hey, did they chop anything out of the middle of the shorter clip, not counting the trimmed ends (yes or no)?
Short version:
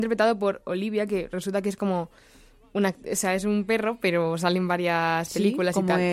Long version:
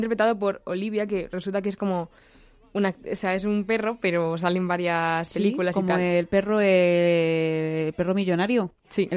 no